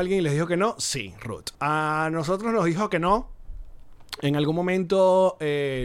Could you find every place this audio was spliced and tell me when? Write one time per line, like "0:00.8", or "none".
0:01.5